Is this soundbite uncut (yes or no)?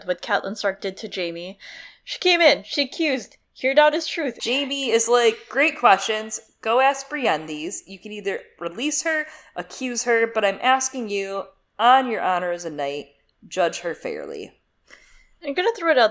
no